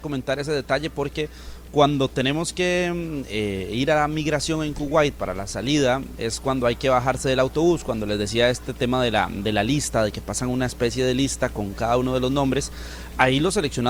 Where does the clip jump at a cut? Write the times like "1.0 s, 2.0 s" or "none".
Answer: none